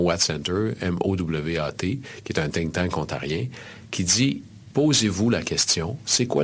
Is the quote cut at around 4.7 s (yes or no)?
yes